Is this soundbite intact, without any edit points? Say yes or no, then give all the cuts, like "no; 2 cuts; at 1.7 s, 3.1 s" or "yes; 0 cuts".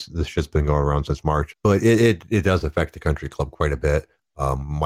no; 1 cut; at 1.5 s